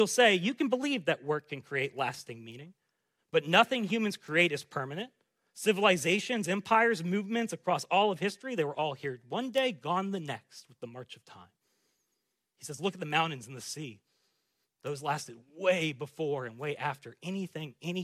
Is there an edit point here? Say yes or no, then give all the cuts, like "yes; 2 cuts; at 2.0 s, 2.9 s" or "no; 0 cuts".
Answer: no; 0 cuts